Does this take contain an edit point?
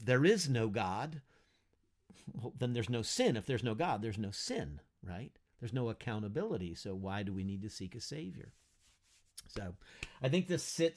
no; 0 cuts

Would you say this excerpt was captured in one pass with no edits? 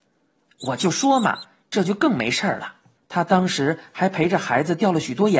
no; 1 cut; at 3.0 s

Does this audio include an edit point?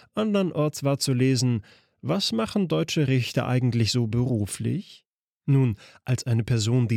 no; 0 cuts

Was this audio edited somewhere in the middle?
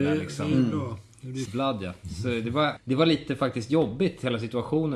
yes; 2 cuts; at 1.4 s, 2.8 s

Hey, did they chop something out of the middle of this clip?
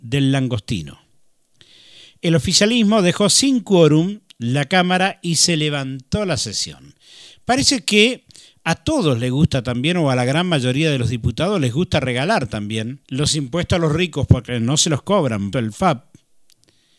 yes; 2 cuts; at 13.0 s, 15.5 s

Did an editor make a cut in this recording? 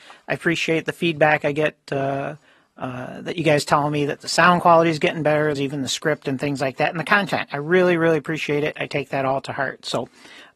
yes; 1 cut; at 5.5 s

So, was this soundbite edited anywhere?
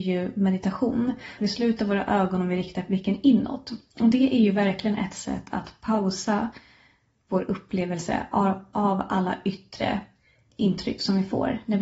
yes; 1 cut; at 1.4 s

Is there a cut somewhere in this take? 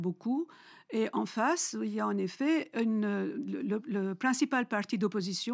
no; 0 cuts

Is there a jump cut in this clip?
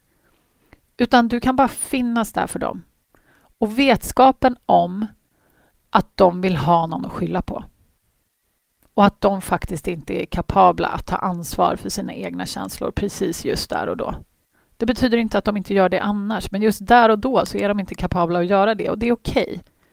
no; 0 cuts

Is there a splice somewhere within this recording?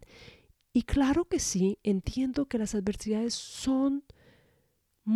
no; 0 cuts

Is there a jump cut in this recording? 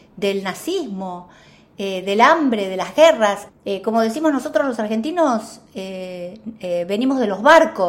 yes; 1 cut; at 3.5 s

